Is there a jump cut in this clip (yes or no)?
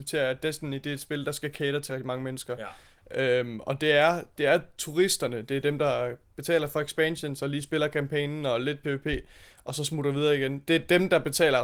yes